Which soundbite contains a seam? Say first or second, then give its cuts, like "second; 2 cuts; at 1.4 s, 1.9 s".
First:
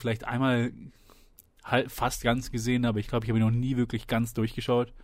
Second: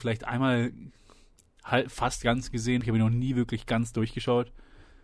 second; 1 cut; at 2.8 s